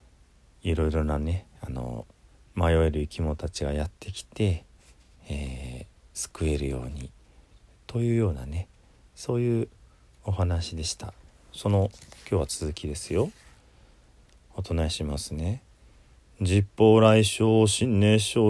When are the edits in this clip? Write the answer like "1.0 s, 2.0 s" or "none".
none